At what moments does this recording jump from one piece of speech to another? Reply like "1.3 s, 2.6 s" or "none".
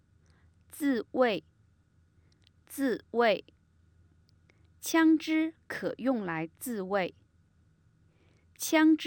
none